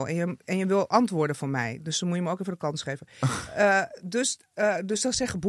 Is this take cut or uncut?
uncut